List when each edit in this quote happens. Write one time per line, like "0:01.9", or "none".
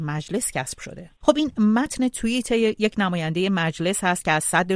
0:01.2